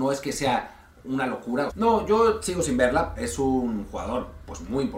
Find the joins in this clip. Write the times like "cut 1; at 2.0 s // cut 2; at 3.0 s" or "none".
cut 1; at 1.7 s // cut 2; at 3.2 s

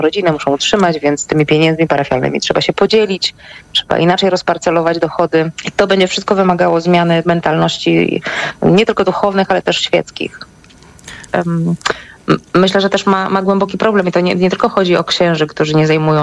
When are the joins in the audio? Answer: cut 1; at 5.6 s // cut 2; at 11.3 s

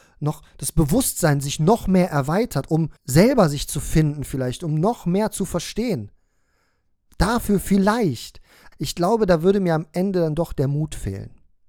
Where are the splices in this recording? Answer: cut 1; at 3.0 s // cut 2; at 8.7 s

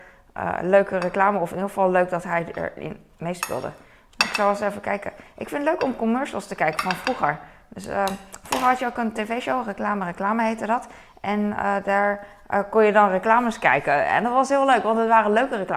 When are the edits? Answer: none

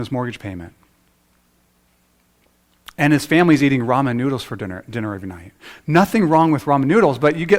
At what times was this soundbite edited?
none

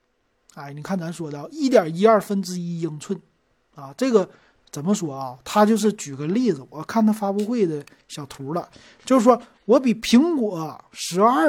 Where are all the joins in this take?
none

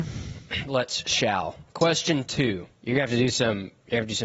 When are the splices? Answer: cut 1; at 2.8 s

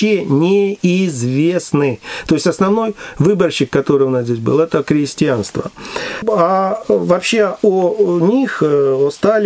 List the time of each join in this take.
none

